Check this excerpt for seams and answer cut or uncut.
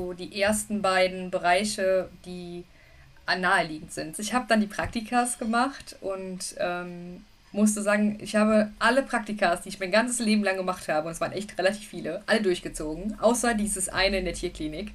cut